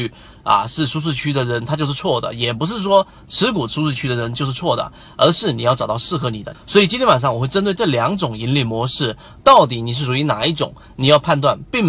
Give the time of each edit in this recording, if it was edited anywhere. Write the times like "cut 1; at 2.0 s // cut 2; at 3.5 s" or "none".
cut 1; at 6.5 s